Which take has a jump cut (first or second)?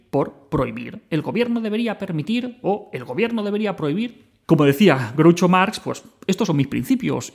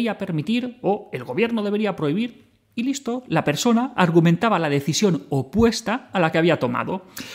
first